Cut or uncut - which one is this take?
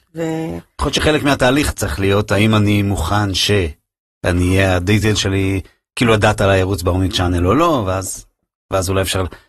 uncut